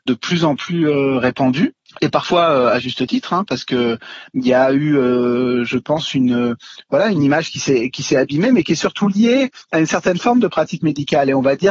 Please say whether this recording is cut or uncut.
uncut